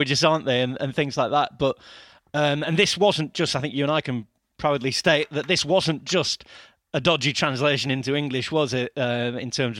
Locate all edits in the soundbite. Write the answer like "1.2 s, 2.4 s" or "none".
none